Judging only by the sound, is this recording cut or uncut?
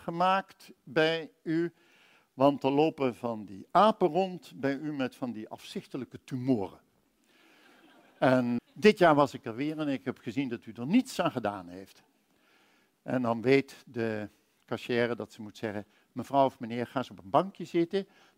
cut